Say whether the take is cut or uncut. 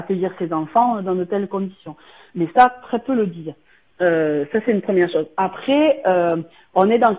uncut